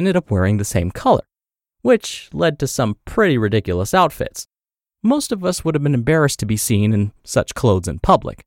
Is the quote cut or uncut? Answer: uncut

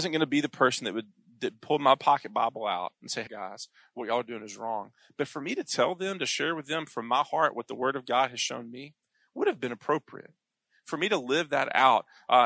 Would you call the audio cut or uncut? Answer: cut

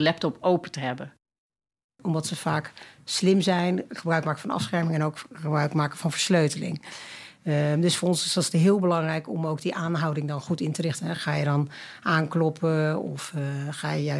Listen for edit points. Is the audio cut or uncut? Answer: uncut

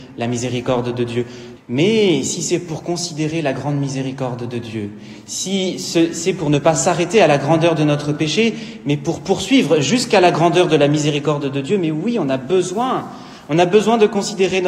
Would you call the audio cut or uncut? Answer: cut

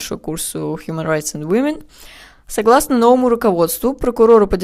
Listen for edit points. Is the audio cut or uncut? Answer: uncut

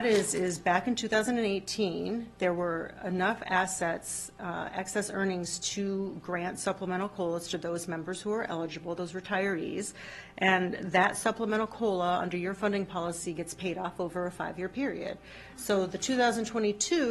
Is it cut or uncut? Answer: uncut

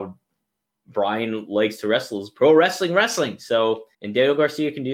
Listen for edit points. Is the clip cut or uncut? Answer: cut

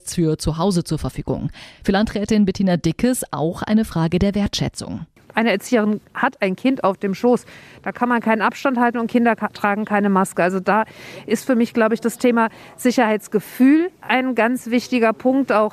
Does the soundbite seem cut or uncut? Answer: uncut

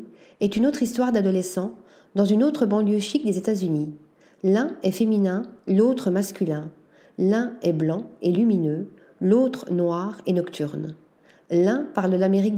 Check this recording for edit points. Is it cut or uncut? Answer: uncut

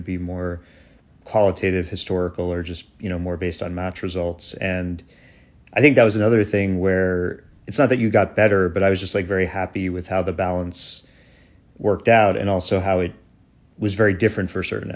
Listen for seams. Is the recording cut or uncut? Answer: uncut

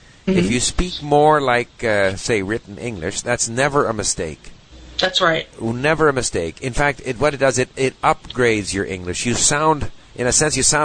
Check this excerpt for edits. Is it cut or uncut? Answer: uncut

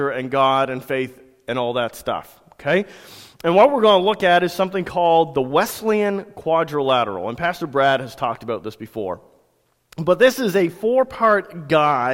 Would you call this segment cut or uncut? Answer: uncut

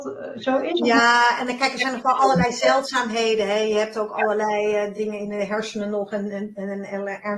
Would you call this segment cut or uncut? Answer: uncut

